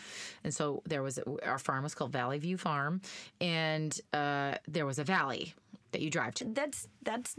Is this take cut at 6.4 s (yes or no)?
yes